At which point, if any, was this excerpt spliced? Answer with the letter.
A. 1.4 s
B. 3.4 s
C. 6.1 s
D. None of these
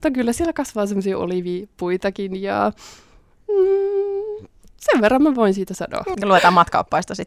C